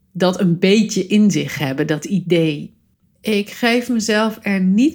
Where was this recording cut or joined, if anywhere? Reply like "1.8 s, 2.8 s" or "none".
3.0 s